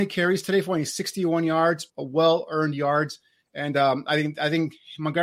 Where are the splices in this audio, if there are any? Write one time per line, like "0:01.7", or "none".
0:01.9